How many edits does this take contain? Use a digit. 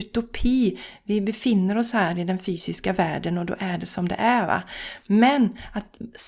0